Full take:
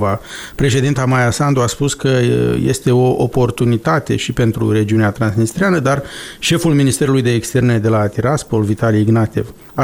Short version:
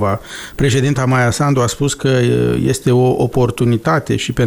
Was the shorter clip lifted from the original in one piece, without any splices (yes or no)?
yes